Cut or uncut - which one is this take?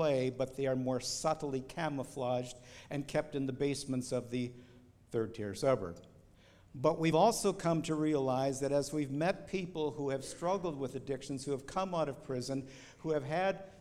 uncut